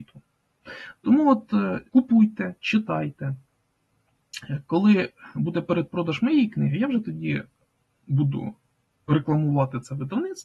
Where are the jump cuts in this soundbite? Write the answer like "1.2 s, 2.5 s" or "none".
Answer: 1.9 s